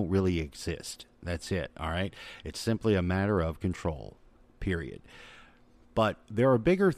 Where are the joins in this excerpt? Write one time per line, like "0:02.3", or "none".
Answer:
0:05.8

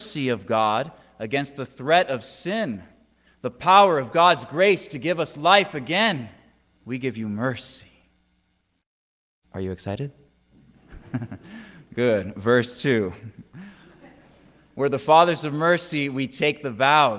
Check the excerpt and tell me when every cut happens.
0:06.6

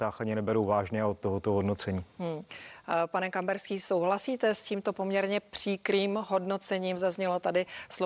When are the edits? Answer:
none

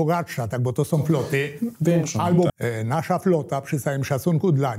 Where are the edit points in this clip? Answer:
0:02.5

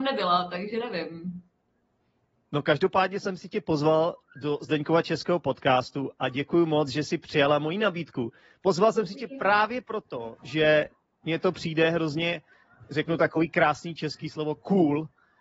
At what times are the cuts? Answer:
none

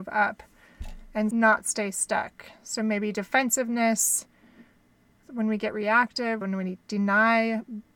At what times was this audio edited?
0:05.2
0:06.4

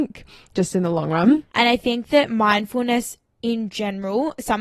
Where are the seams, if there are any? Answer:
0:01.5

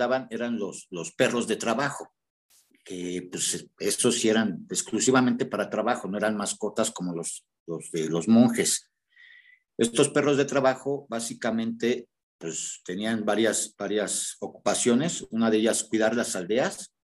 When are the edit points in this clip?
none

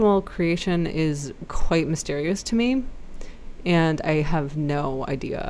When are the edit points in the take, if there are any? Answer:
none

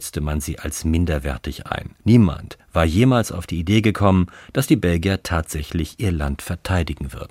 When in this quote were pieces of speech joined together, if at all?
0:02.0

